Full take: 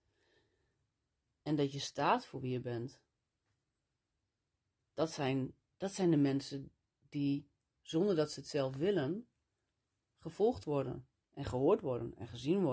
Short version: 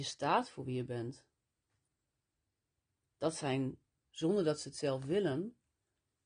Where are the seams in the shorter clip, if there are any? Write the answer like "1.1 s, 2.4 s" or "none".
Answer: 4.0 s